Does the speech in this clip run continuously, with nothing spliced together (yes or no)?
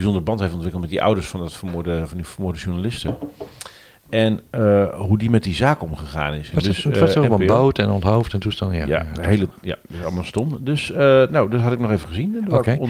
no